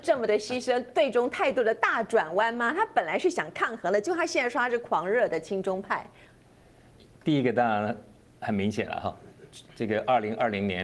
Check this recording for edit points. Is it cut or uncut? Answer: uncut